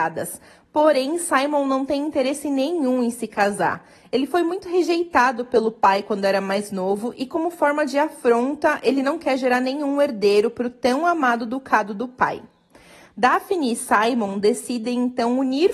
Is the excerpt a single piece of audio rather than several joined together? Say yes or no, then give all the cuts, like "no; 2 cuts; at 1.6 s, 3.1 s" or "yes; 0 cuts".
yes; 0 cuts